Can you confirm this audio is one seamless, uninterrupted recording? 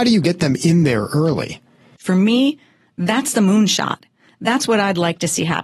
yes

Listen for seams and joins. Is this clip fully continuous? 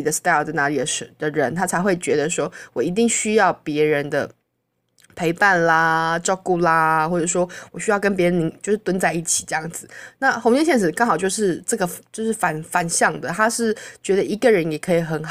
yes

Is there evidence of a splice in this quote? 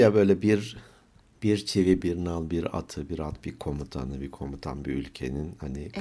yes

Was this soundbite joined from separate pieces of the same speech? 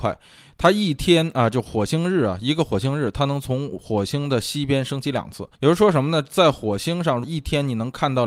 yes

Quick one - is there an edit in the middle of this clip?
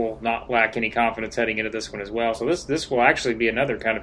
no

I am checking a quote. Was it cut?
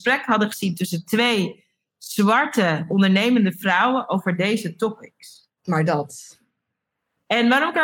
yes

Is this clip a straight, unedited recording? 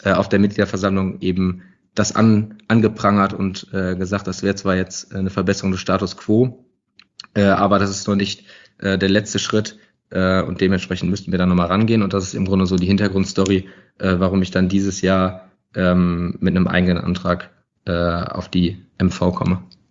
yes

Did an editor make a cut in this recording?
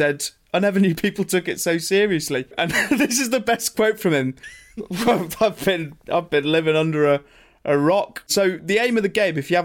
yes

